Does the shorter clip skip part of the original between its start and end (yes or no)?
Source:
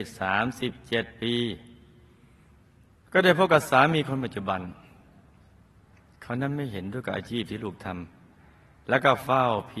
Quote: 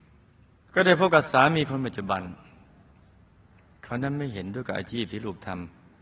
no